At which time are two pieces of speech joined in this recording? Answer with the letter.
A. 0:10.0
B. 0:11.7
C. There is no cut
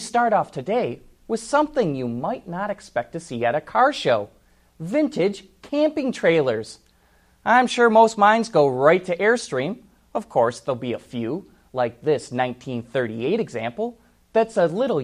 C